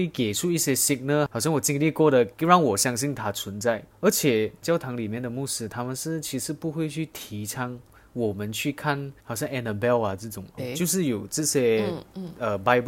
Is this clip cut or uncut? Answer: cut